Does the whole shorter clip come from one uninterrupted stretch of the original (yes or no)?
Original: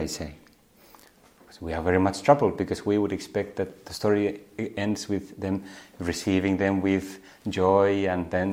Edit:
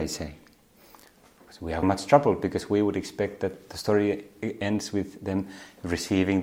no